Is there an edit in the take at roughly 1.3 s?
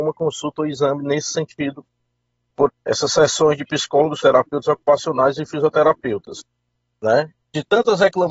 no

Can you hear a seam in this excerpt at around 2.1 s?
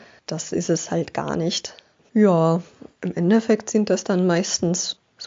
yes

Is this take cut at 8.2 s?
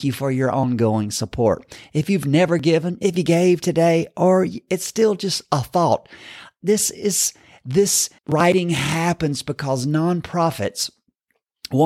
yes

